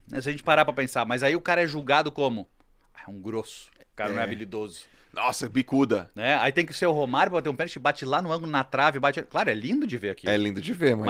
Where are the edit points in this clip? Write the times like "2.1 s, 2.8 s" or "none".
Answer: none